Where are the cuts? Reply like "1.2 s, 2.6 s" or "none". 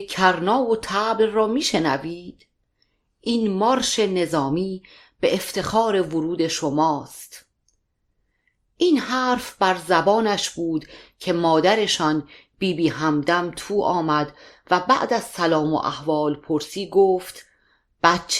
none